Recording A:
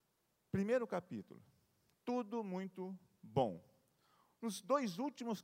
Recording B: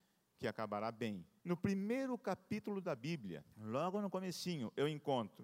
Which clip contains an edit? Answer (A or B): B